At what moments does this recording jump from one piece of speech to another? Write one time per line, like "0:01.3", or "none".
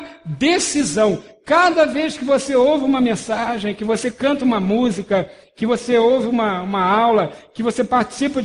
none